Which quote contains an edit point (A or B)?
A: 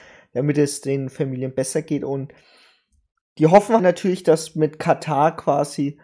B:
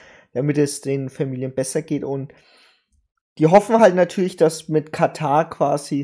A